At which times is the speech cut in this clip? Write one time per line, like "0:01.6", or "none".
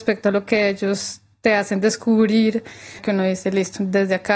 none

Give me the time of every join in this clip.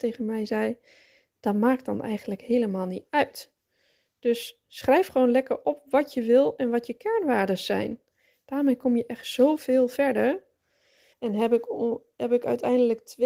0:11.1

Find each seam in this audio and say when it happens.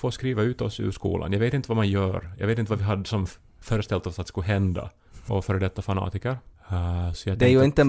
0:05.3
0:06.5

